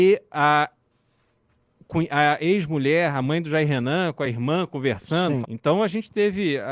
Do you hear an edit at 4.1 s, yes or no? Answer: no